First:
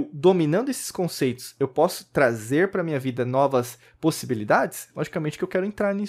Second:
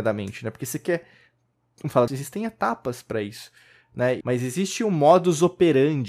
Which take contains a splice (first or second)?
second